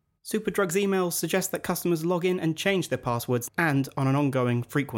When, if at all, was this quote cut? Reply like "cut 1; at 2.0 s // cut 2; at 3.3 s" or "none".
cut 1; at 3.5 s

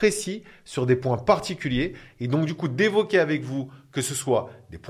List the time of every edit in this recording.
none

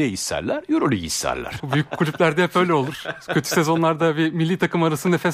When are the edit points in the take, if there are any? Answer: cut 1; at 1.6 s

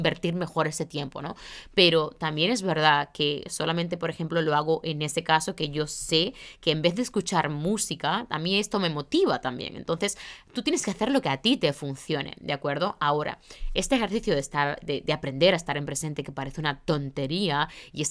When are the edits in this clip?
none

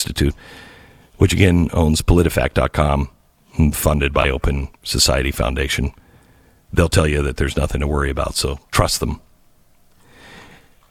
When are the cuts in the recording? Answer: cut 1; at 8.7 s

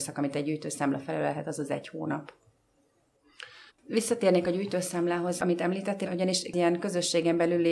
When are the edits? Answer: cut 1; at 3.7 s // cut 2; at 6.1 s

